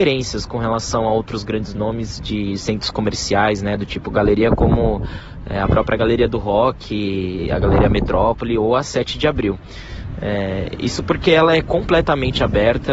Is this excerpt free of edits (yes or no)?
yes